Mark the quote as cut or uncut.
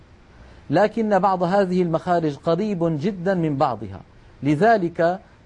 uncut